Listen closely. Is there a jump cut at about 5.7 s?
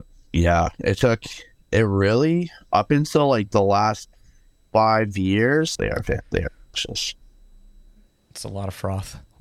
yes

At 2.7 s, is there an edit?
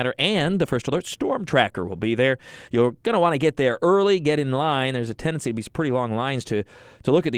yes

